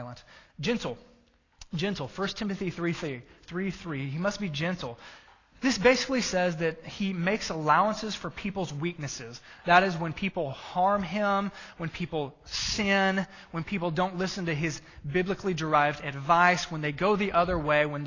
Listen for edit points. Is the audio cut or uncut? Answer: uncut